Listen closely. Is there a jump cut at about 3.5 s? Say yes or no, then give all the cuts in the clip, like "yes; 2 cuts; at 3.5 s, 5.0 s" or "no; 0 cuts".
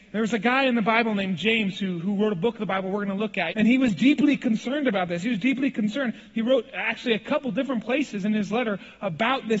yes; 1 cut; at 3.5 s